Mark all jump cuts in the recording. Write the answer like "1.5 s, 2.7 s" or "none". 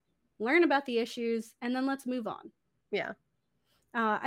none